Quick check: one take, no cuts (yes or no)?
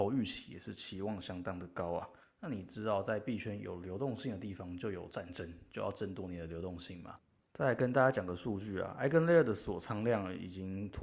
no